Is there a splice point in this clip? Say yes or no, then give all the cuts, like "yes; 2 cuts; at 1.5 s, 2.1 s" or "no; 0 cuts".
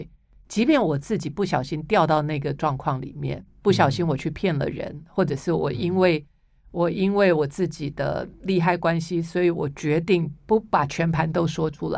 no; 0 cuts